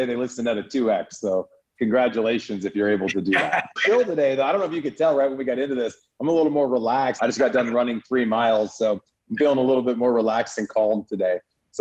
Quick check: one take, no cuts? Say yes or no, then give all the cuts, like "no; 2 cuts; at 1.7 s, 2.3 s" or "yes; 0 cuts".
no; 2 cuts; at 3.8 s, 7.2 s